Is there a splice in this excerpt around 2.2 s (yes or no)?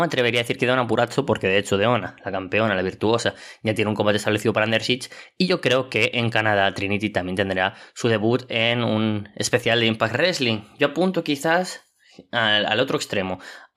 no